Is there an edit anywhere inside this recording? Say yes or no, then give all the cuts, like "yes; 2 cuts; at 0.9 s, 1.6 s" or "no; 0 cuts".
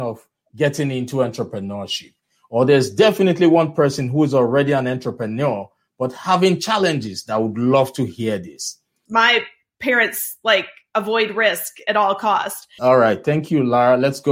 yes; 2 cuts; at 9.1 s, 12.8 s